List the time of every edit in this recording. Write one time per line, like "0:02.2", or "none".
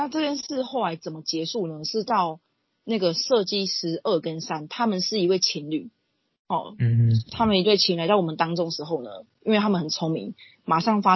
none